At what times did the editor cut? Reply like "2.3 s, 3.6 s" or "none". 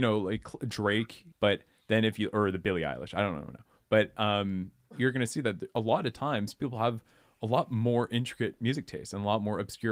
1.3 s, 4.9 s